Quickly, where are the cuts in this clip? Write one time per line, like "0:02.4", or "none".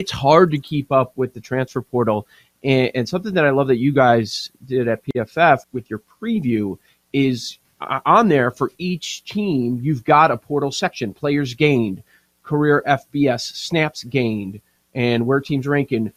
0:05.6